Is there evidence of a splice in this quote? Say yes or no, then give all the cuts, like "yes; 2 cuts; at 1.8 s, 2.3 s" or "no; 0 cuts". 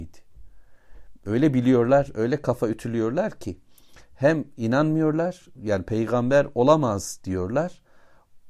no; 0 cuts